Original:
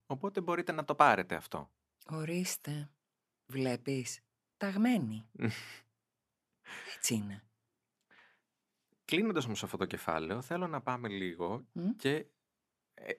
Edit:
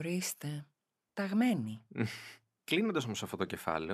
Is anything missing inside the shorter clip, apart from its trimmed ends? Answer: yes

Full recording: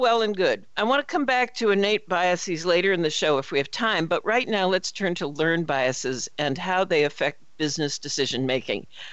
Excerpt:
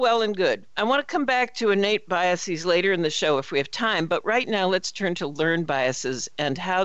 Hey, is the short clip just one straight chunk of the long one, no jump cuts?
yes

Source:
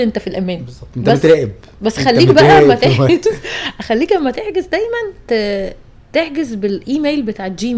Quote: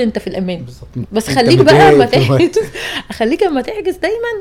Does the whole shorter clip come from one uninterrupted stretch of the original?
no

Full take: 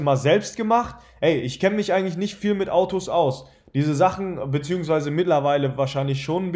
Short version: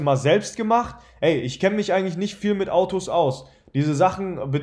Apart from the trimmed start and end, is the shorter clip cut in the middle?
no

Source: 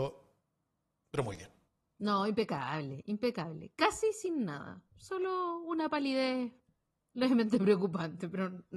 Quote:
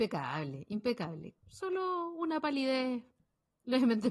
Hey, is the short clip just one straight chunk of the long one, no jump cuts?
no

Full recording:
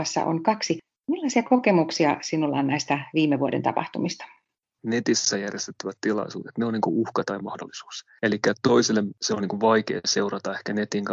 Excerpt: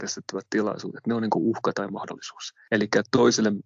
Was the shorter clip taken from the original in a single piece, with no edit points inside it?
yes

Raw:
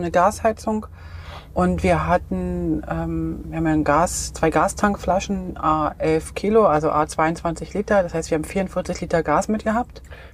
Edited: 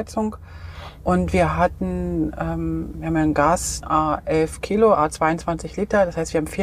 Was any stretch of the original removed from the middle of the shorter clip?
yes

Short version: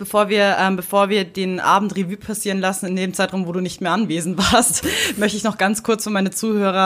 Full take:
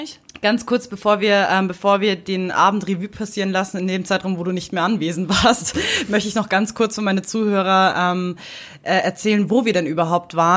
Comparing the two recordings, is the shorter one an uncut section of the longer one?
yes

